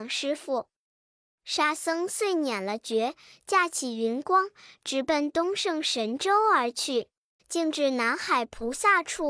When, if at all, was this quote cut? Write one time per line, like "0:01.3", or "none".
0:01.1
0:07.4